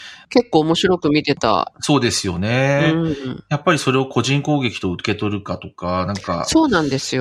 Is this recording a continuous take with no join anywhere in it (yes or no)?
yes